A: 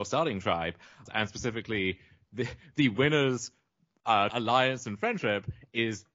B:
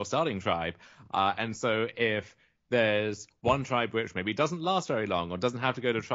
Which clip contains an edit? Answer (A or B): A